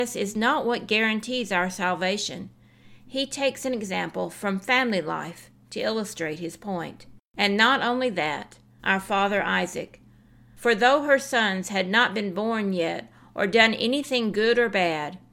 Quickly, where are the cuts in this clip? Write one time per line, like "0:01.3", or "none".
0:07.2
0:08.8